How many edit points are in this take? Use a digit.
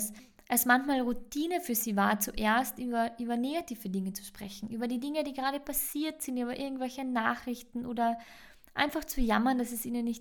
0